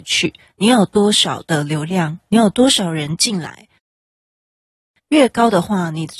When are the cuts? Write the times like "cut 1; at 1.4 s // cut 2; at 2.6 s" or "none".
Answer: cut 1; at 5.0 s